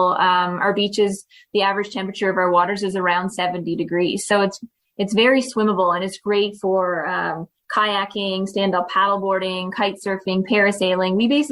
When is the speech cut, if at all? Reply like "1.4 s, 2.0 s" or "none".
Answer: none